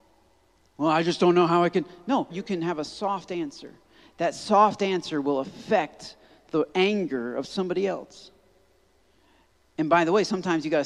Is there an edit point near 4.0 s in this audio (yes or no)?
no